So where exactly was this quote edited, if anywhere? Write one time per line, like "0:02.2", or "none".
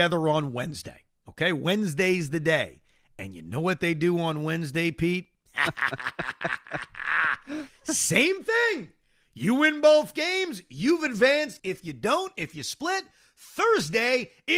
0:05.5
0:11.6